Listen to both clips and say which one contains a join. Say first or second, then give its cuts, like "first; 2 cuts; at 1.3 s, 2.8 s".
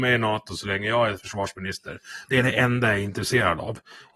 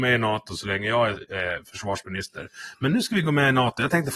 first; 2 cuts; at 1.1 s, 2.3 s